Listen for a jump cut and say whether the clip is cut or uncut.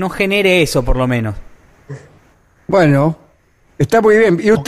uncut